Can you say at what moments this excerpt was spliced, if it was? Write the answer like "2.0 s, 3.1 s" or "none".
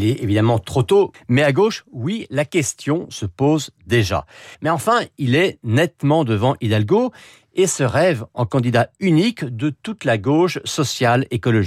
1.1 s, 4.5 s